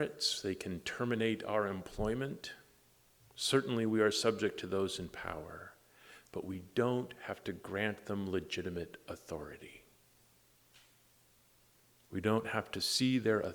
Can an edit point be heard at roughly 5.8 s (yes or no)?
no